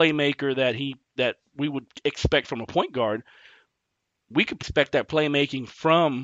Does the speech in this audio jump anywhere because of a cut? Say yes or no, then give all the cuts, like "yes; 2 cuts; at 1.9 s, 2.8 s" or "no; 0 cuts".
yes; 2 cuts; at 1.2 s, 4.6 s